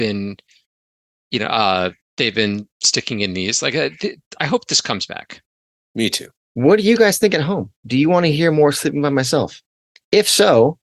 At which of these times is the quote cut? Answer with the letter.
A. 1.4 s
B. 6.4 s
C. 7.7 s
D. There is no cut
D